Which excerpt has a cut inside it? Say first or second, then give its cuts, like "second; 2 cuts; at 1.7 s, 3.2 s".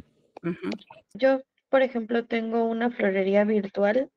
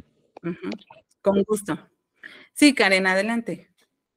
first; 1 cut; at 1.1 s